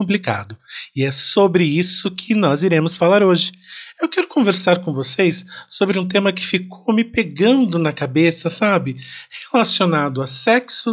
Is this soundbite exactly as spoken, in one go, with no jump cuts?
yes; 0 cuts

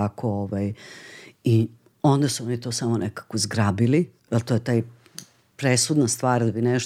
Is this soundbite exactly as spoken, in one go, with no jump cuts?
no; 1 cut; at 4.2 s

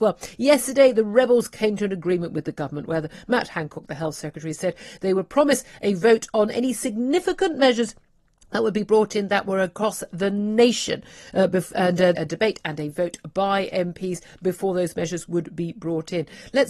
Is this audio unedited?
no; 1 cut; at 12.2 s

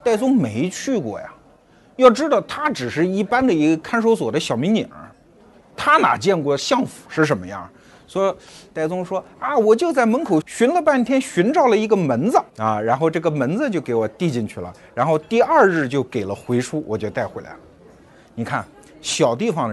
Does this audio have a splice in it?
yes; 2 cuts; at 10.4 s, 12.5 s

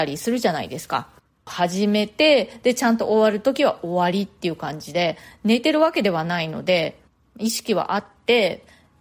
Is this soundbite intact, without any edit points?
no; 1 cut; at 1.5 s

